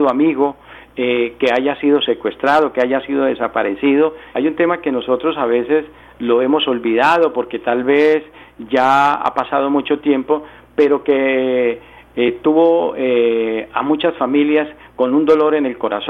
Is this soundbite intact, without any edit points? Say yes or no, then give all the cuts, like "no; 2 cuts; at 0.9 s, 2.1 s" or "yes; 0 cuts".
no; 1 cut; at 4.3 s